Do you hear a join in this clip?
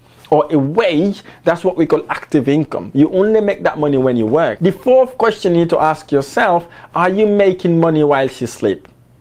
yes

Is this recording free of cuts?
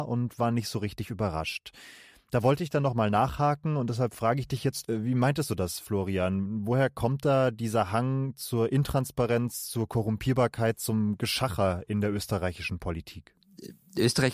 yes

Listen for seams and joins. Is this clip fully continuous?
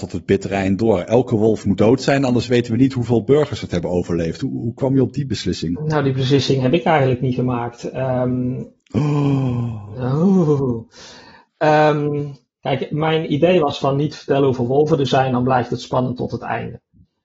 yes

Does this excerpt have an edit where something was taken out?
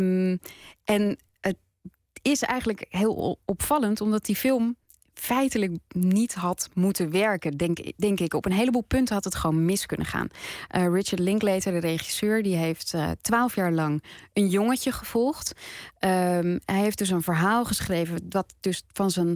no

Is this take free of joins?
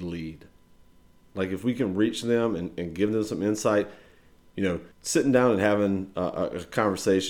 no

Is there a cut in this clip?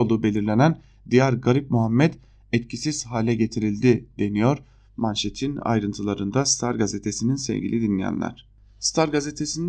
no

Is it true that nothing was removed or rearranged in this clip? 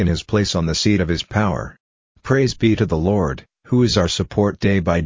yes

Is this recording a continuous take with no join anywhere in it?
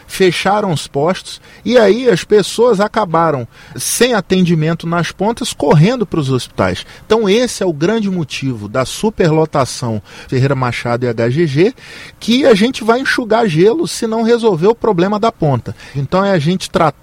no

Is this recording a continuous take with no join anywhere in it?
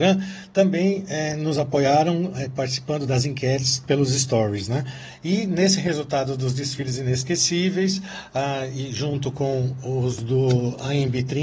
yes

